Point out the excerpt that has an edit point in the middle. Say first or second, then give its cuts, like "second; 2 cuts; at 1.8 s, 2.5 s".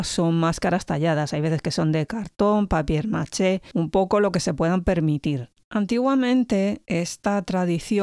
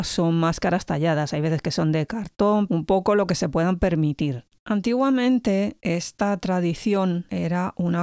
second; 1 cut; at 2.7 s